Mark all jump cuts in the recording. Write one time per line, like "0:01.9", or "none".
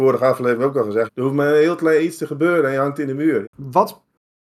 0:01.1
0:03.4